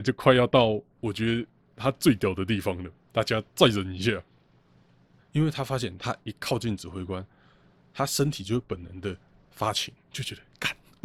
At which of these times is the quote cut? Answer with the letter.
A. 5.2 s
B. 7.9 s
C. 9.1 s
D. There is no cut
A